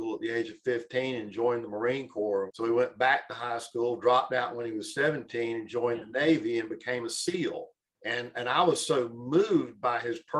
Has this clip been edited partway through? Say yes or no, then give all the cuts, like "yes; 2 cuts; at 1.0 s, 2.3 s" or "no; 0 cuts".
yes; 2 cuts; at 2.5 s, 7.8 s